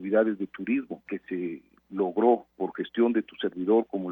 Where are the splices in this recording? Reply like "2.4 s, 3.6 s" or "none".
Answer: 1.1 s, 2.5 s